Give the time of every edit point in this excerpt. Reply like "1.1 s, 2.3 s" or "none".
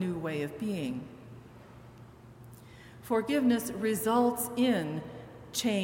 3.0 s